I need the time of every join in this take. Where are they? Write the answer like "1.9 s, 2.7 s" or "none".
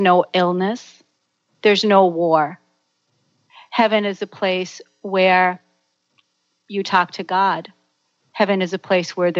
none